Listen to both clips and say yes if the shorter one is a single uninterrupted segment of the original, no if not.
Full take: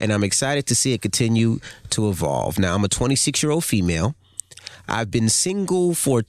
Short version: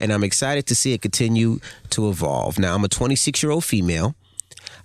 yes